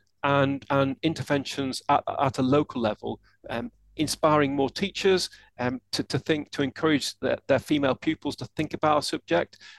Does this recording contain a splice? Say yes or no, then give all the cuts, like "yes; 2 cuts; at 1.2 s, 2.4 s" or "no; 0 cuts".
no; 0 cuts